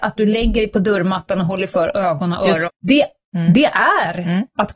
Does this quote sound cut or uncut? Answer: cut